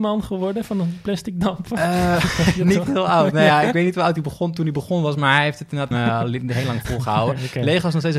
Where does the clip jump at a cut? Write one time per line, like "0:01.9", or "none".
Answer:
0:05.9